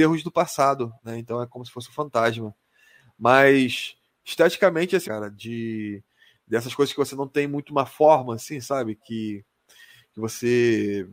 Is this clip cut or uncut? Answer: cut